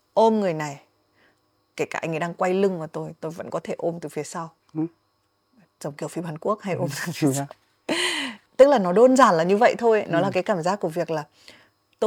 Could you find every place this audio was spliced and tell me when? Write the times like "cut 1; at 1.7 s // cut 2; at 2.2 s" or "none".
none